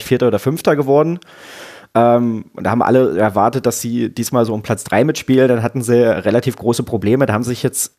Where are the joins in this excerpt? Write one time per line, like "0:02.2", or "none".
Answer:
none